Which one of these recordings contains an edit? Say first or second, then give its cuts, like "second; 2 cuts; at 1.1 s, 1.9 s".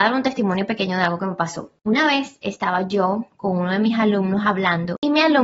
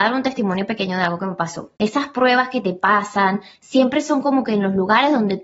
second; 1 cut; at 1.8 s